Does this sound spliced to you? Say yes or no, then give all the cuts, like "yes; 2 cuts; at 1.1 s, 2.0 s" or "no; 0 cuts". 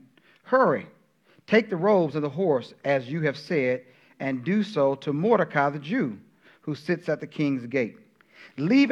no; 0 cuts